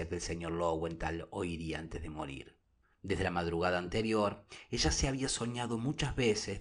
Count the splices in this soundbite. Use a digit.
1